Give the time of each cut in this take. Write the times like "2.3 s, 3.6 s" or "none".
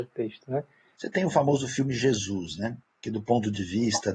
1.0 s